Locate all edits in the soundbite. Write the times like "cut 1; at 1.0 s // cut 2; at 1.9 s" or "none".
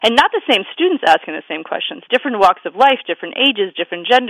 cut 1; at 2.1 s